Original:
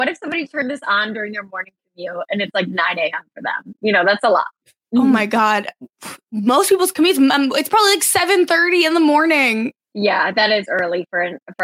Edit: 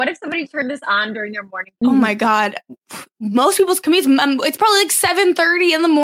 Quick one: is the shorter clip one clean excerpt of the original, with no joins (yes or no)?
no